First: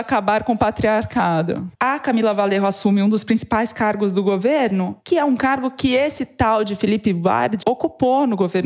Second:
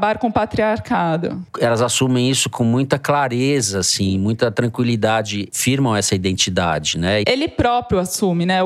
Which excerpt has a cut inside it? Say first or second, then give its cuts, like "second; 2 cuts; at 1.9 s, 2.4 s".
first; 2 cuts; at 1.7 s, 7.6 s